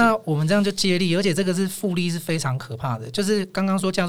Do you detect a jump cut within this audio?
no; 0 cuts

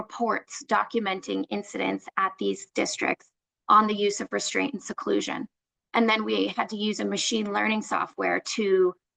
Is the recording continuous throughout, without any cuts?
no; 1 cut; at 5.8 s

